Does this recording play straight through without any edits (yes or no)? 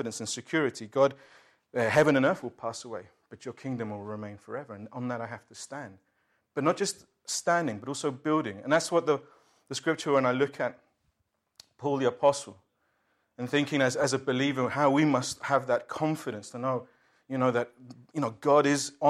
yes